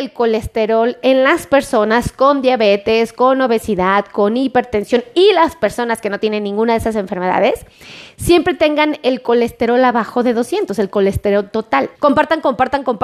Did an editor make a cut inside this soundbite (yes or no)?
yes